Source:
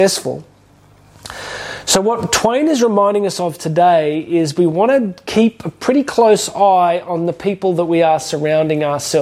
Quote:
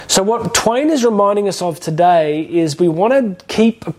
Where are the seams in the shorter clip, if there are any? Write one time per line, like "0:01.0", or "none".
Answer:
none